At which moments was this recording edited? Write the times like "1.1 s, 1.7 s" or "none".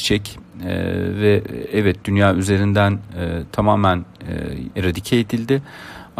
4.7 s